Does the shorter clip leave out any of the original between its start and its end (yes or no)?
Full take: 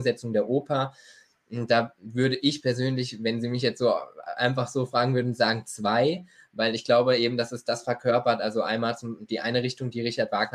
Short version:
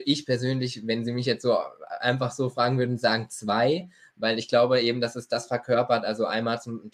no